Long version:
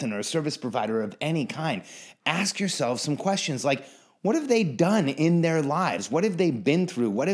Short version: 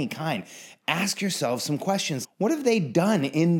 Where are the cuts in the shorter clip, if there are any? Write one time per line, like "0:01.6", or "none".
0:02.2

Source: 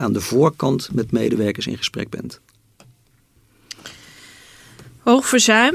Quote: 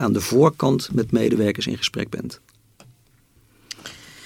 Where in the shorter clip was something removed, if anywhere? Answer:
none

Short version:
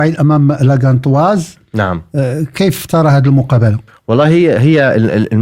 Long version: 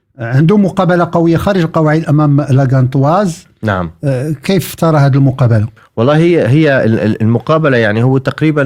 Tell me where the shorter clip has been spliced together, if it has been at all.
none

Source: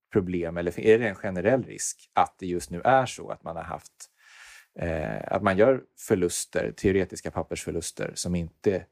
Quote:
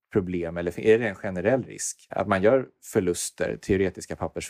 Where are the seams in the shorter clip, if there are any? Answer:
0:02.1

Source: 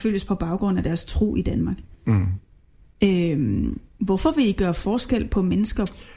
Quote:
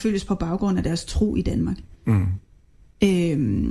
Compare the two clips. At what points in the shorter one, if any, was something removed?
none

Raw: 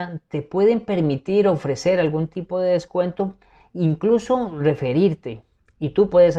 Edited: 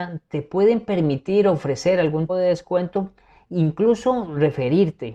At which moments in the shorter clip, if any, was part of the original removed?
0:02.3

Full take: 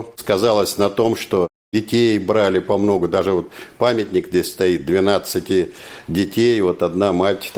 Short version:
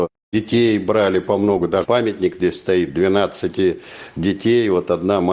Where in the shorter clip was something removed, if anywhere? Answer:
0:01.8

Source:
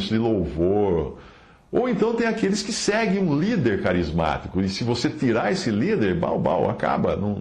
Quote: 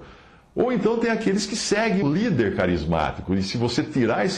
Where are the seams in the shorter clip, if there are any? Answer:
0:02.0

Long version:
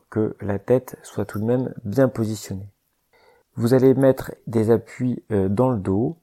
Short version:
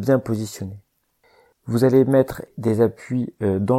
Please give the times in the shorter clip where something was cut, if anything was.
none

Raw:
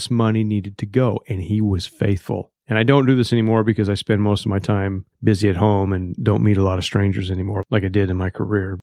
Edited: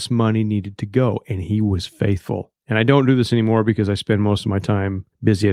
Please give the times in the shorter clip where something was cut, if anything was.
none

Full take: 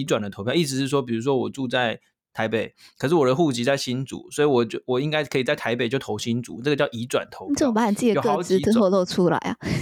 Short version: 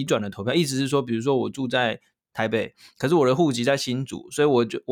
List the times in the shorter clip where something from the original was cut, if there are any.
none

